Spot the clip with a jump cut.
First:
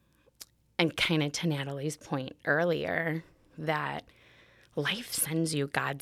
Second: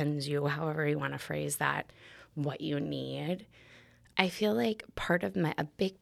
second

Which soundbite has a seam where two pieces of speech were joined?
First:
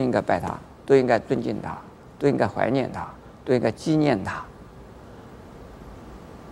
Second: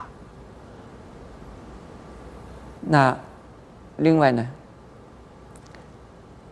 second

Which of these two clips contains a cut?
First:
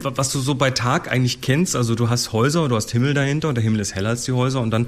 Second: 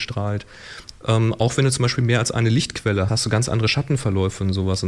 second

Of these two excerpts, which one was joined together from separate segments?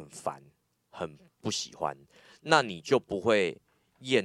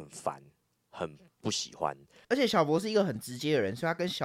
second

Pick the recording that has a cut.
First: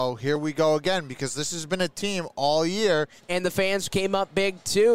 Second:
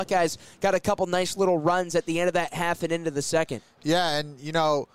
first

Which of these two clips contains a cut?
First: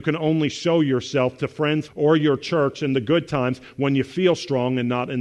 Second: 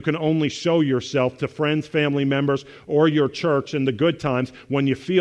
first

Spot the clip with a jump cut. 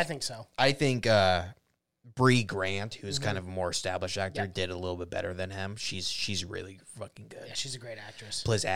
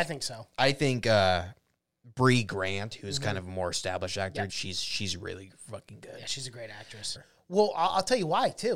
second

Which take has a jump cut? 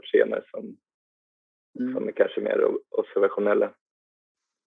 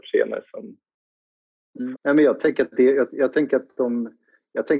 second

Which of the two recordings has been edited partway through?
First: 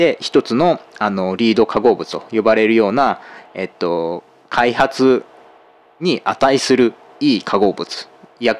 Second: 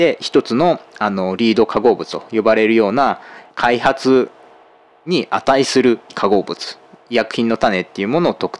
second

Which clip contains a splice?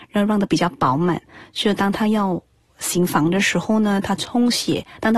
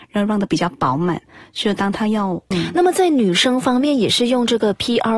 second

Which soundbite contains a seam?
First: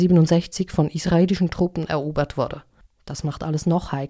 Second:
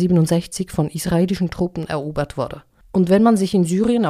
first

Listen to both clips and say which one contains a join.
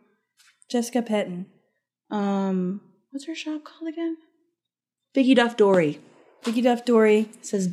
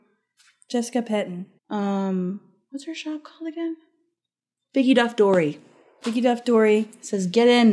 second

